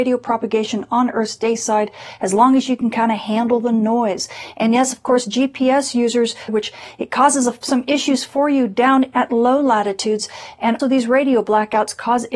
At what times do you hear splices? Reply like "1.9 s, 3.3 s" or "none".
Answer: 6.5 s, 10.8 s